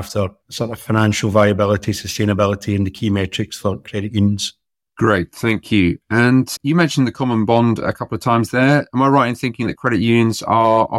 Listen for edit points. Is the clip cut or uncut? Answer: cut